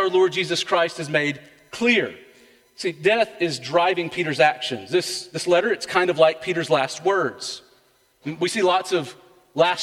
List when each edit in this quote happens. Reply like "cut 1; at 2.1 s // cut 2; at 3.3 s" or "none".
none

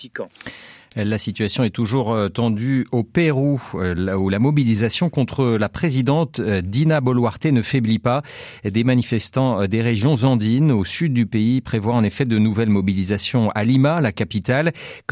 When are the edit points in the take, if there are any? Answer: none

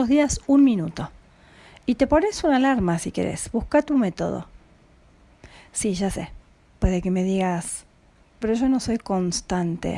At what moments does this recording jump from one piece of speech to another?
cut 1; at 8.4 s

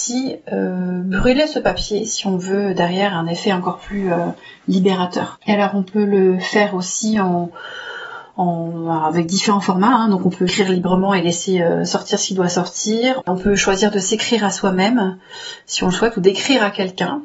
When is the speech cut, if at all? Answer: cut 1; at 5.4 s // cut 2; at 13.2 s

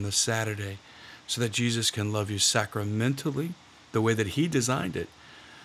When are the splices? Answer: none

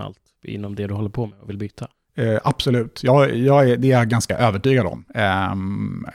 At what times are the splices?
none

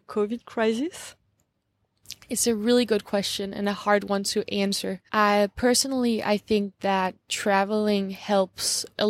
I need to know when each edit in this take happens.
cut 1; at 5.1 s

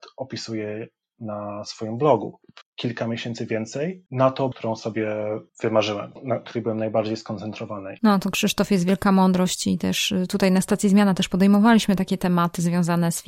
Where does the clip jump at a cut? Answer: cut 1; at 2.6 s // cut 2; at 4.5 s // cut 3; at 8.0 s

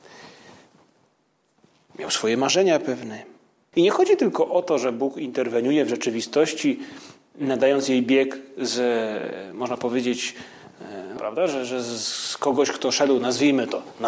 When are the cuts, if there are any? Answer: cut 1; at 3.7 s // cut 2; at 11.2 s

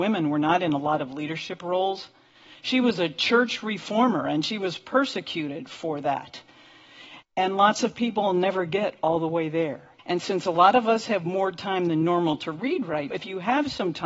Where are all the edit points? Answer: cut 1; at 7.2 s // cut 2; at 10.0 s // cut 3; at 13.1 s

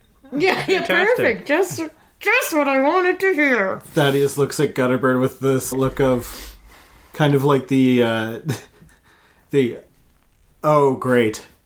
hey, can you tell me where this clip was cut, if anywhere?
cut 1; at 5.7 s

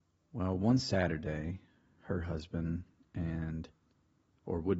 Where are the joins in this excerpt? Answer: none

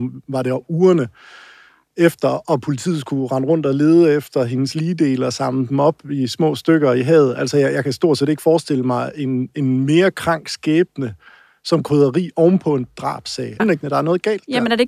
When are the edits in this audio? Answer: cut 1; at 13.6 s

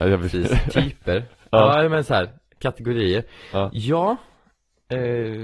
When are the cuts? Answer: none

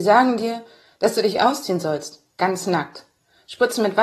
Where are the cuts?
none

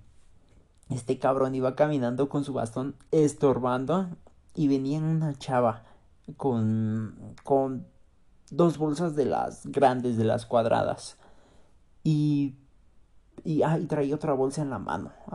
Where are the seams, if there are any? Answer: none

